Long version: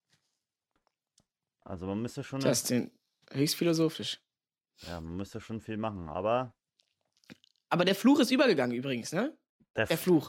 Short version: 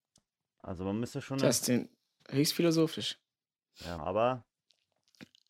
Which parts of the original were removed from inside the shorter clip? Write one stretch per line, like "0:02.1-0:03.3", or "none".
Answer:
0:05.0-0:06.1